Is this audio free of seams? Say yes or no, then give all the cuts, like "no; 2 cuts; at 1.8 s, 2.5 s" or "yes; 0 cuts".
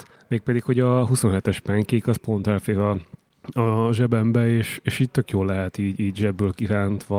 yes; 0 cuts